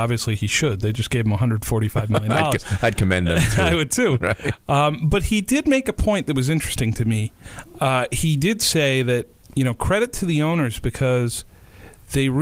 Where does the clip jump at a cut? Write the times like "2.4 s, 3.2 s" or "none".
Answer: none